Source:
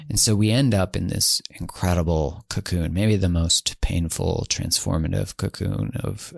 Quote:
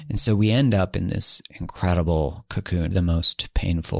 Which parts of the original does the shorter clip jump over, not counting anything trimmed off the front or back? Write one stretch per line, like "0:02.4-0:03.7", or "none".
0:02.9-0:03.2